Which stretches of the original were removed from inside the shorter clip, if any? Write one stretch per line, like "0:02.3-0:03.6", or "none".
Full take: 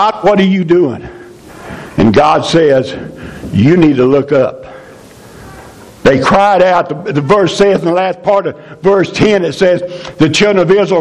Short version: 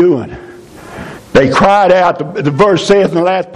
0:01.9-0:05.9